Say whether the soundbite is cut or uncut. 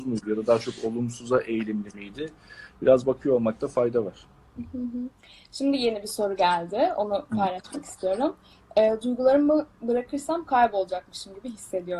uncut